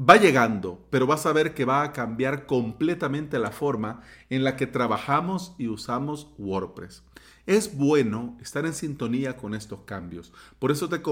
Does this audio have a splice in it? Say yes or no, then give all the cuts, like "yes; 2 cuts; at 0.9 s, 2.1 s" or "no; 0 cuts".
no; 0 cuts